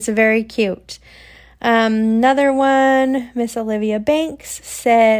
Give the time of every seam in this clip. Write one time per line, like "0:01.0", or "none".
none